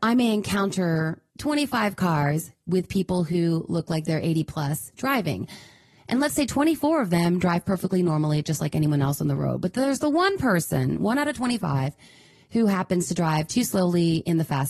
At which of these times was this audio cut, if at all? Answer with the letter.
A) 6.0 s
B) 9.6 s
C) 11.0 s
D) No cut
D